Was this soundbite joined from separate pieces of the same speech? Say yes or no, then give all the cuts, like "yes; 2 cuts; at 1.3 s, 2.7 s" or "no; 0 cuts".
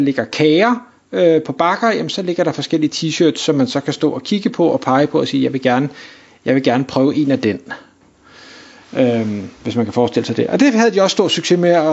no; 0 cuts